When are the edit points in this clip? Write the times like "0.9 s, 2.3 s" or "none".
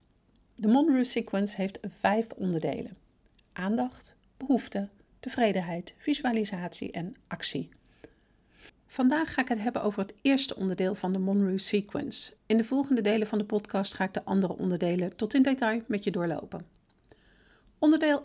none